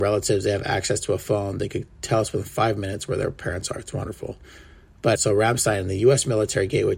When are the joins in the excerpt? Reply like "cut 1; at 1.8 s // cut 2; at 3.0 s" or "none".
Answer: cut 1; at 5.2 s